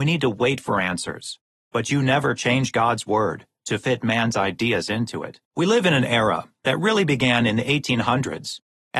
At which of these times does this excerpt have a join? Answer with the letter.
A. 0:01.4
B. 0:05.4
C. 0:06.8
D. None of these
B